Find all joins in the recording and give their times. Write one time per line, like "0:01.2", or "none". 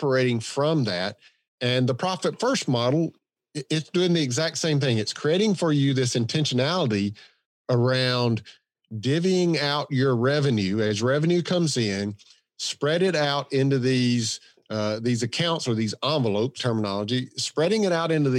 0:01.4
0:16.6